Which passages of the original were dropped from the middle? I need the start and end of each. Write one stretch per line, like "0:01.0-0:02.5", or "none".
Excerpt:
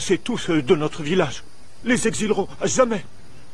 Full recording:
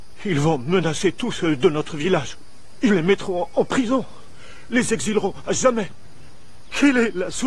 0:02.7-0:04.7